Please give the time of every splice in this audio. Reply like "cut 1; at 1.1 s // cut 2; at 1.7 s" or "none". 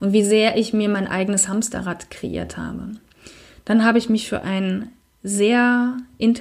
none